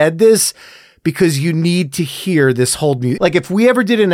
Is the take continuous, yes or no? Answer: no